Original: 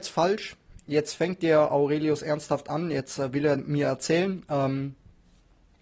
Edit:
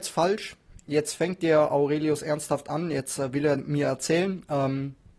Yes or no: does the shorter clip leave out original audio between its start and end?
no